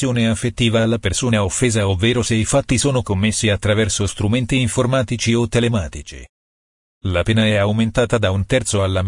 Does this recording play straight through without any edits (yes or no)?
yes